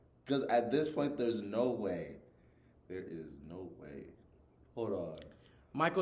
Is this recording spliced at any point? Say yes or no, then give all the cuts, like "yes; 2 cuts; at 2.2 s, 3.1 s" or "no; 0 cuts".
no; 0 cuts